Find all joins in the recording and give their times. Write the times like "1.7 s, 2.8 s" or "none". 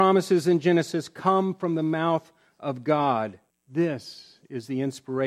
3.5 s